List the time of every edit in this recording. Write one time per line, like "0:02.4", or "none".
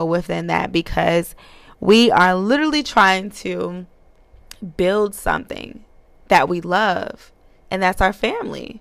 none